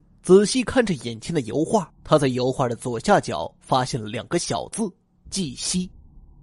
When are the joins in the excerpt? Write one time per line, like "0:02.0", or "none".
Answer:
0:02.0